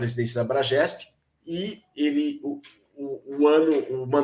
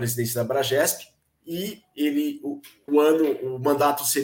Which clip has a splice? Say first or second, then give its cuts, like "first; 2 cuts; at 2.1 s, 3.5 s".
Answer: second; 1 cut; at 2.9 s